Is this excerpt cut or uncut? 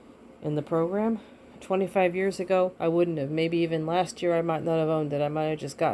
cut